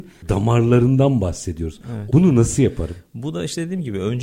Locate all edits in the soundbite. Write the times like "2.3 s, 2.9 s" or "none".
2.1 s

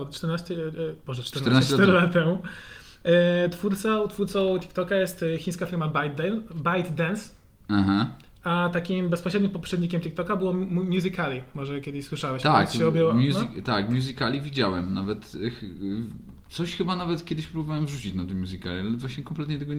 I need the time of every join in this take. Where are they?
none

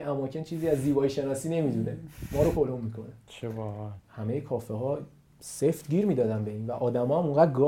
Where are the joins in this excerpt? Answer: 4.0 s

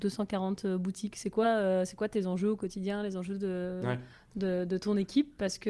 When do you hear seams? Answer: none

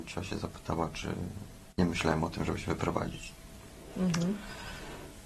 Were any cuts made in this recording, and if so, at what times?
1.7 s

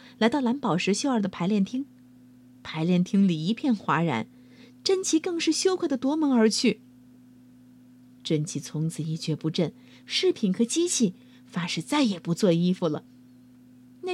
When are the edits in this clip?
2.6 s, 10.0 s

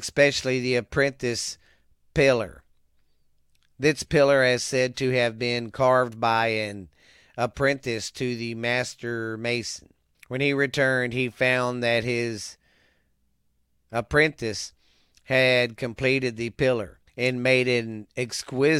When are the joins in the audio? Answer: 10.1 s, 17.1 s

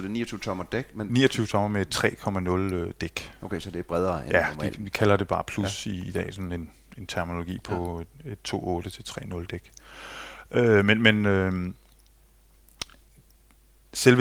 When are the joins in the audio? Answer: none

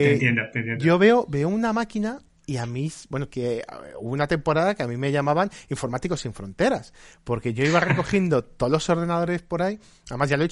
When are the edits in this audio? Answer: 3.3 s

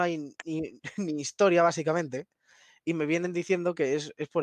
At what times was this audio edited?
none

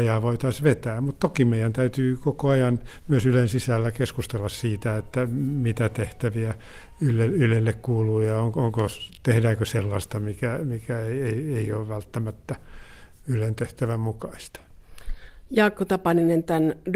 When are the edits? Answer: none

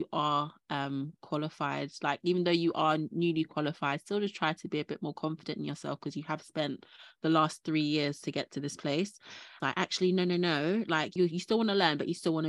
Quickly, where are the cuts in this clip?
9.6 s, 11.2 s

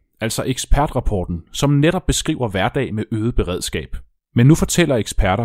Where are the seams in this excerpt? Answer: 4.2 s

